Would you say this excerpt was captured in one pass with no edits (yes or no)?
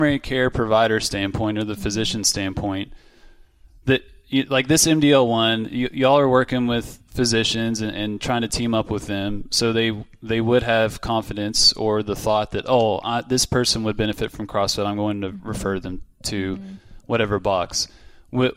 yes